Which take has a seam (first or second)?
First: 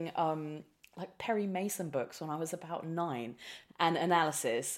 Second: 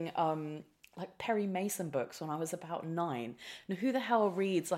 first